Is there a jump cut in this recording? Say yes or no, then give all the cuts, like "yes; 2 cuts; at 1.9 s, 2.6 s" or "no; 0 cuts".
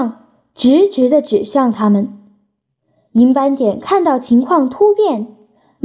no; 0 cuts